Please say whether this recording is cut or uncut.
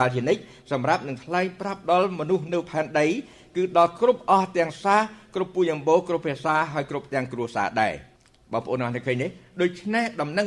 uncut